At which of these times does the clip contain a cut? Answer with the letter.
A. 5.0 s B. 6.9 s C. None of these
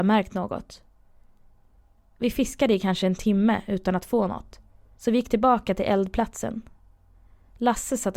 A